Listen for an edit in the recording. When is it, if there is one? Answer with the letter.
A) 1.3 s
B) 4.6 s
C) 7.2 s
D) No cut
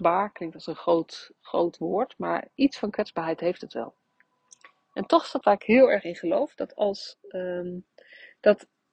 D